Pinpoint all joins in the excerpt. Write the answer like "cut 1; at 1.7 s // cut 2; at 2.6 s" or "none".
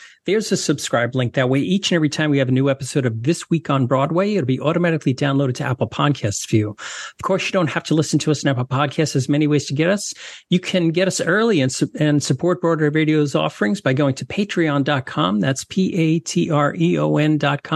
none

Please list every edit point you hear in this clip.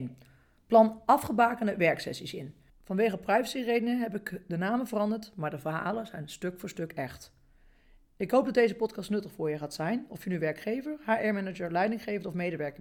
cut 1; at 2.7 s

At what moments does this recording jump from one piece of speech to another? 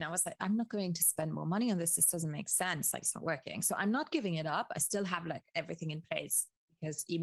cut 1; at 3.0 s

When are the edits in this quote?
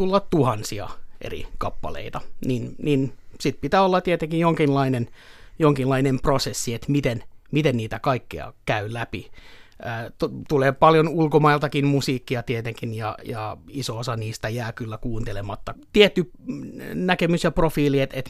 cut 1; at 13.2 s // cut 2; at 15.7 s

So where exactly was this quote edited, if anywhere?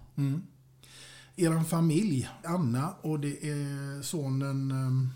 cut 1; at 2.4 s

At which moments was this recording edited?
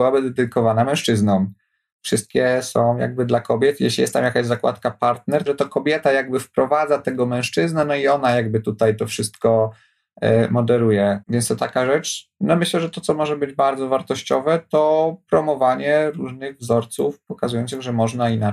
cut 1; at 5.5 s // cut 2; at 11.2 s

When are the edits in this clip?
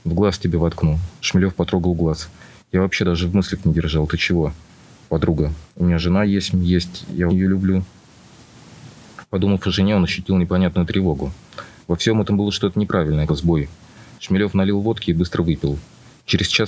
cut 1; at 7.3 s // cut 2; at 13.3 s

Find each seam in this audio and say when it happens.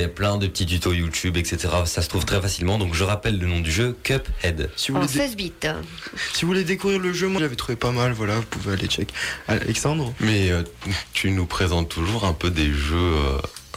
cut 1; at 7.4 s

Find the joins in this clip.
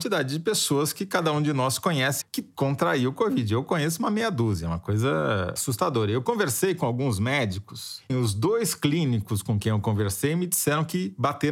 cut 1; at 2.2 s // cut 2; at 8.1 s

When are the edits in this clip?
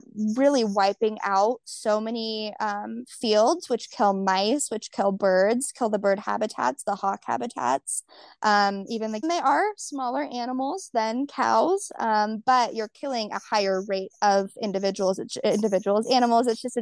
cut 1; at 9.2 s

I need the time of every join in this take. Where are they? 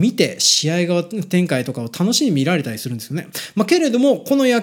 none

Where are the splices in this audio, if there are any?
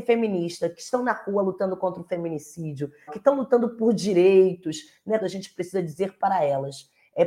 cut 1; at 3.1 s // cut 2; at 5.2 s

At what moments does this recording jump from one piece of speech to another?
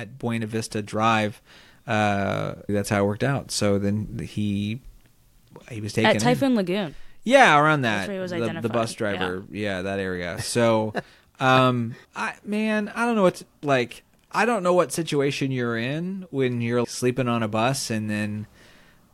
cut 1; at 2.7 s // cut 2; at 12.0 s // cut 3; at 16.8 s

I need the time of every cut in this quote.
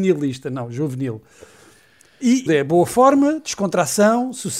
cut 1; at 2.5 s

